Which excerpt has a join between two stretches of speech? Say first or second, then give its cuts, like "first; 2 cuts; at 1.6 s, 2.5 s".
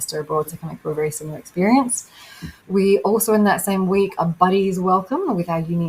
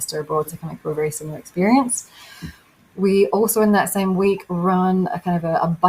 first; 2 cuts; at 2.6 s, 4.2 s